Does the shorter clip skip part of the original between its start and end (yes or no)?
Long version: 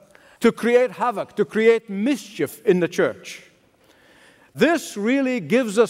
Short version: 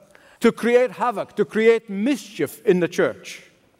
no